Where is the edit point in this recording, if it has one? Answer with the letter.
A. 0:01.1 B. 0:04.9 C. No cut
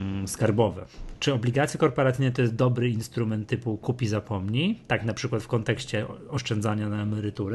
A